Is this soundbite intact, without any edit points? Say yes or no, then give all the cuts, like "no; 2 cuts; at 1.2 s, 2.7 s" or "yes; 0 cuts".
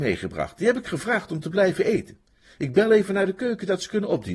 yes; 0 cuts